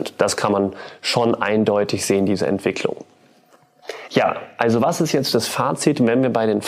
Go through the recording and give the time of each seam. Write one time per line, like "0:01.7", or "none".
none